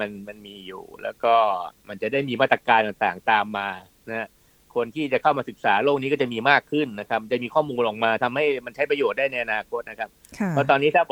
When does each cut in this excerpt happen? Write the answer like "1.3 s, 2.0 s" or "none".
none